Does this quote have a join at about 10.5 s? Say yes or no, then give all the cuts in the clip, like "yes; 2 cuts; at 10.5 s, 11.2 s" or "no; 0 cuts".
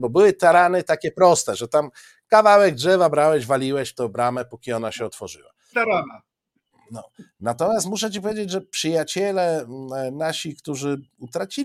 no; 1 cut; at 5.7 s